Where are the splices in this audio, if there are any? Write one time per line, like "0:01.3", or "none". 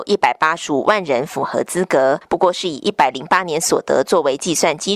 none